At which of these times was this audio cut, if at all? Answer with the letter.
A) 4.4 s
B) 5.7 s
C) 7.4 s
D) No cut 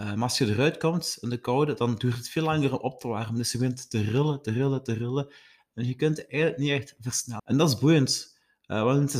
C